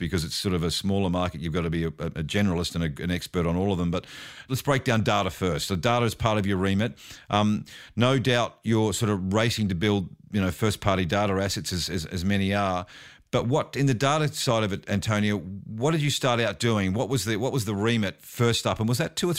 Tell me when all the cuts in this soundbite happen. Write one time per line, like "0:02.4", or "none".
none